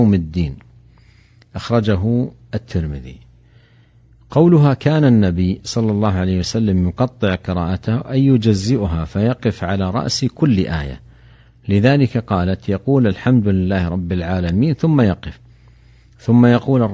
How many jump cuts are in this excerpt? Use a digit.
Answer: 0